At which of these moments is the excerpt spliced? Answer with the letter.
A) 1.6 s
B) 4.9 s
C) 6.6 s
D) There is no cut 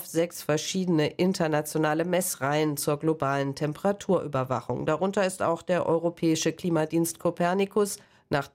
D